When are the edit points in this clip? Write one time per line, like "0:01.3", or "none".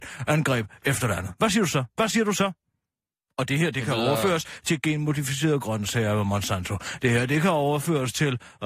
none